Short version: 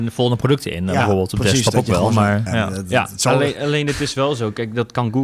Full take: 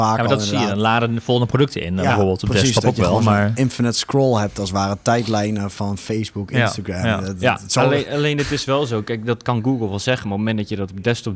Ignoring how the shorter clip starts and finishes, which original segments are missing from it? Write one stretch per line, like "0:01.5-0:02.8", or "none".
0:03.6-0:07.0